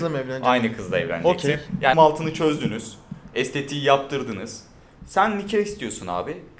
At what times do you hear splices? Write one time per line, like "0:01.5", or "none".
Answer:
0:01.9
0:05.0